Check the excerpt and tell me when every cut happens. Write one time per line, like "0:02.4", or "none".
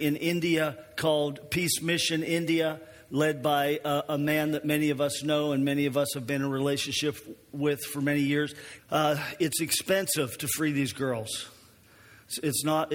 0:08.8